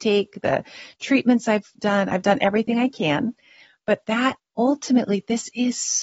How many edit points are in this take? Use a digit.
0